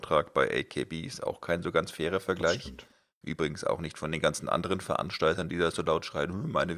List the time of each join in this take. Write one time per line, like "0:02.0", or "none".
none

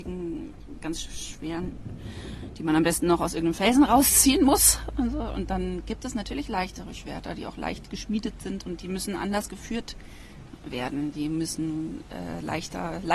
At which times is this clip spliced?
none

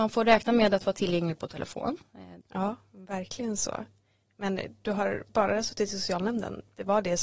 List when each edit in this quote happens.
0:02.4

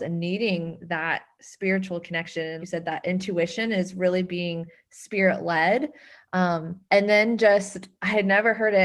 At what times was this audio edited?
0:02.6
0:06.8

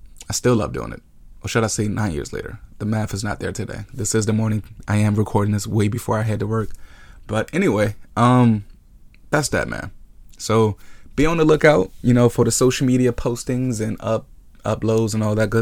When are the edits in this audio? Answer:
0:02.7

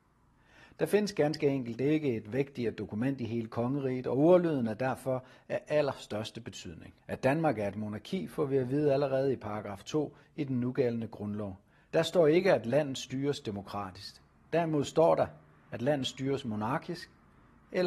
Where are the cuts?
0:07.0
0:11.9

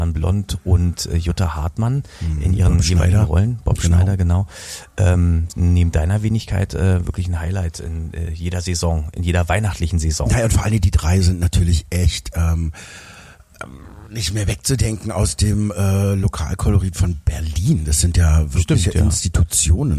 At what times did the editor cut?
0:05.5

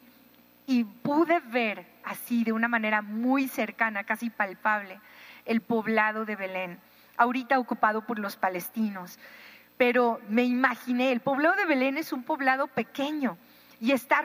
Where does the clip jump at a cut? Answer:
none

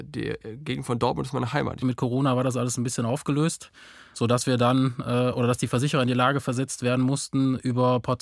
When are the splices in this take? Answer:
0:01.8

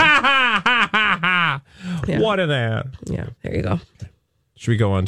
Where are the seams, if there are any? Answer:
0:03.4

